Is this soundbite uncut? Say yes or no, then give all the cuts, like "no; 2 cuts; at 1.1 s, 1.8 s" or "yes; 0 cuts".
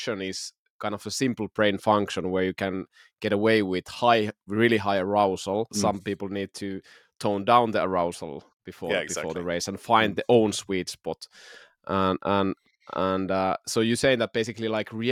no; 1 cut; at 5.7 s